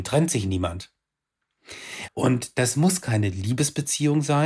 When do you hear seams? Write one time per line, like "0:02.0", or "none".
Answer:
0:02.1